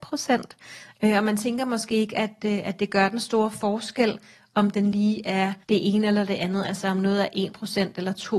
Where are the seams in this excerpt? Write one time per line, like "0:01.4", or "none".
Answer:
0:00.9
0:05.6